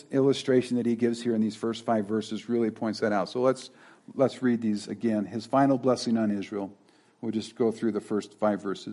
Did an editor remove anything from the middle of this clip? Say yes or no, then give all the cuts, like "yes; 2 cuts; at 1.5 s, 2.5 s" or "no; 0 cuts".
no; 0 cuts